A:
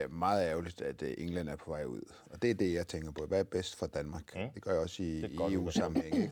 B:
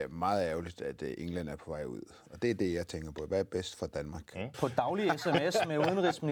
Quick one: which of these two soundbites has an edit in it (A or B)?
B